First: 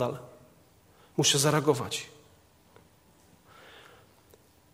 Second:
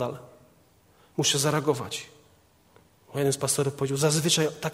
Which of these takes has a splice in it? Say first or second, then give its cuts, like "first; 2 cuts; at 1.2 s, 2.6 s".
second; 1 cut; at 3.0 s